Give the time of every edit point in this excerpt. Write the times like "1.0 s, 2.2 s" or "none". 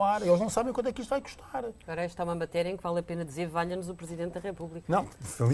none